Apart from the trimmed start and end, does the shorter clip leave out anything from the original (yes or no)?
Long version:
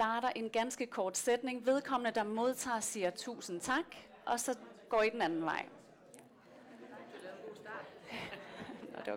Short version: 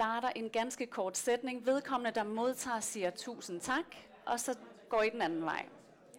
no